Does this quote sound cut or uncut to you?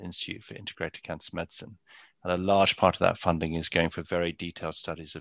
uncut